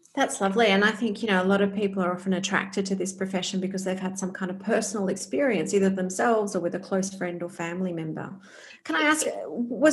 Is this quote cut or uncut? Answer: uncut